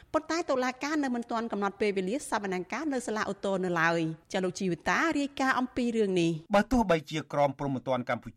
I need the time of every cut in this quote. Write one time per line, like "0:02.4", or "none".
0:04.2
0:06.5